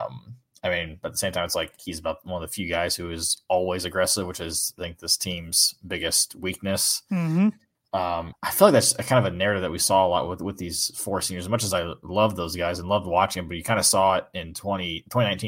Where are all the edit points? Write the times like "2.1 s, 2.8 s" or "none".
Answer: 8.3 s